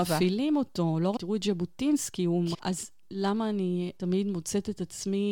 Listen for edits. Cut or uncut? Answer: cut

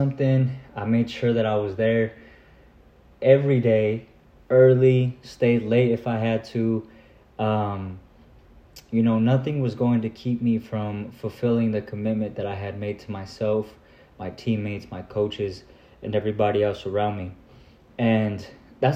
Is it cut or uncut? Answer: uncut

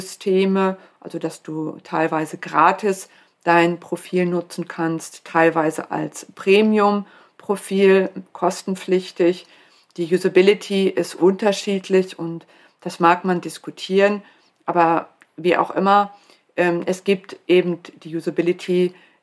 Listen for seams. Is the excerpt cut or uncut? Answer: uncut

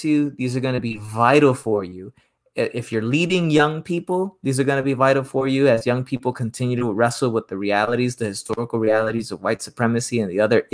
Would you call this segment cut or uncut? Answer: uncut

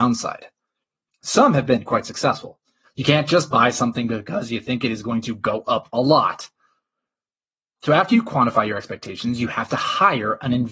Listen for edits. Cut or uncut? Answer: cut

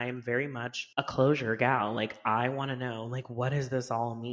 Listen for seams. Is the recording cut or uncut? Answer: cut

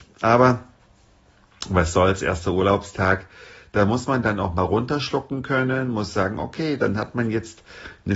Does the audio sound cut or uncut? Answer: uncut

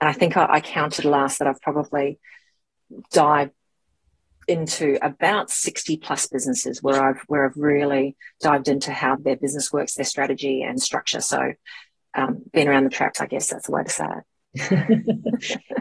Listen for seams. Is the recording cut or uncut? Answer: cut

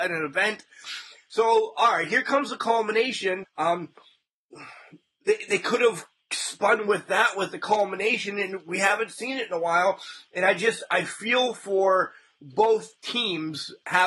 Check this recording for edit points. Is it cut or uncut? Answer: cut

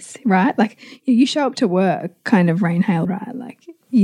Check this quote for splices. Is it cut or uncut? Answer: cut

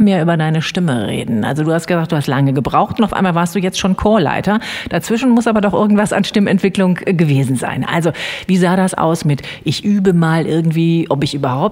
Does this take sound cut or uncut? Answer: uncut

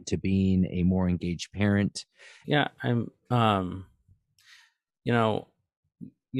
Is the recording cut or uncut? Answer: cut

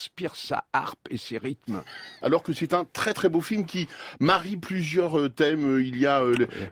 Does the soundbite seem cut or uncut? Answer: cut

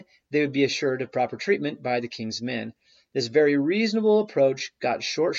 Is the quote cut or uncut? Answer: uncut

